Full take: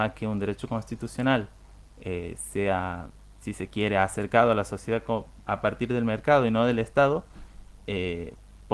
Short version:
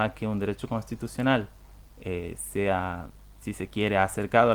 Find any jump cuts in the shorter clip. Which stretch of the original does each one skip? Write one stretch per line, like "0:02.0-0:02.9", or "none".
none